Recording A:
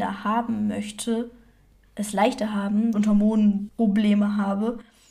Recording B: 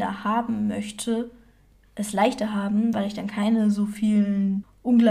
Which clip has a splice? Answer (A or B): A